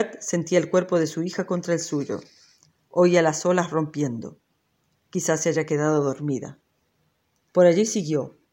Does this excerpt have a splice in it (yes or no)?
yes